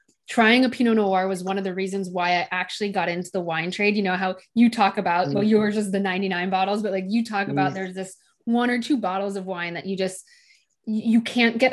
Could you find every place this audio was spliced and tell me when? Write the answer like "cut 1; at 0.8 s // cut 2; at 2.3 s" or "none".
none